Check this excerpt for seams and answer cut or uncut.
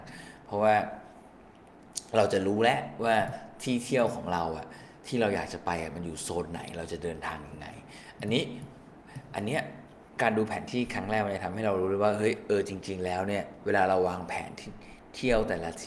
uncut